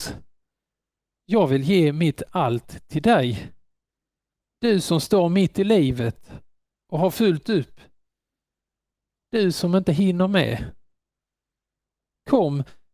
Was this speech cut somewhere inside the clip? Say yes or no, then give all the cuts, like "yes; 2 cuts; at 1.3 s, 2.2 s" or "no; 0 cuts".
yes; 1 cut; at 4.4 s